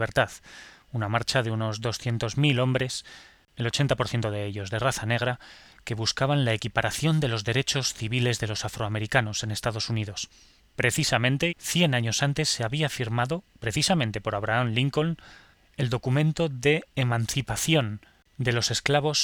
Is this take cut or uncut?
cut